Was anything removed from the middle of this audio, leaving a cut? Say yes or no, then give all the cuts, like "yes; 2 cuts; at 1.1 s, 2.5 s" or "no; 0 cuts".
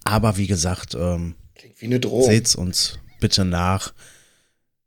no; 0 cuts